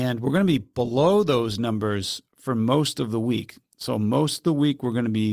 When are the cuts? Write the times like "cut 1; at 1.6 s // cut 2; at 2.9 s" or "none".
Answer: none